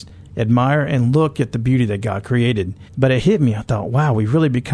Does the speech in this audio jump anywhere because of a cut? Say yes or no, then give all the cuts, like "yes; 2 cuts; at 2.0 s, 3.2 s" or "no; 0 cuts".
yes; 1 cut; at 2.9 s